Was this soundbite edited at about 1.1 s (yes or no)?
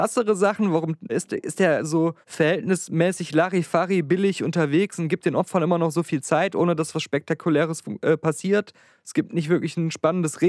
yes